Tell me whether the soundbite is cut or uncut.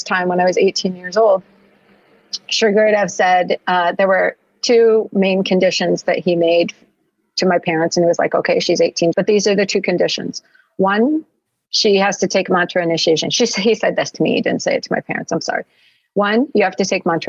cut